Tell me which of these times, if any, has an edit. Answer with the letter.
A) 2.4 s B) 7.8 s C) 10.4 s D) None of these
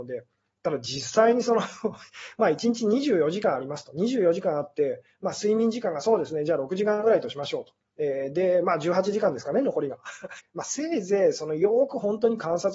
C